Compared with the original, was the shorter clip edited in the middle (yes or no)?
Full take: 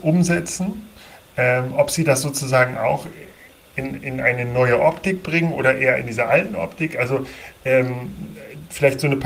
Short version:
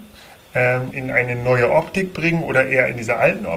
yes